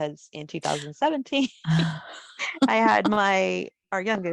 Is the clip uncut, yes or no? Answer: yes